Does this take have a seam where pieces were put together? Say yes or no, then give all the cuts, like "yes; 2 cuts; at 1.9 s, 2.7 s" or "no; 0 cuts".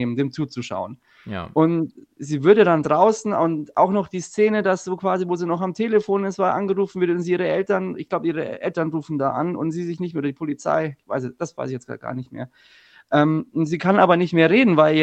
no; 0 cuts